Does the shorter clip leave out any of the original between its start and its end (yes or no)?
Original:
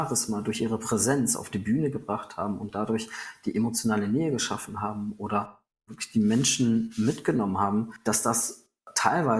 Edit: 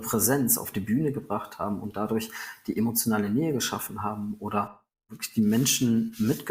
no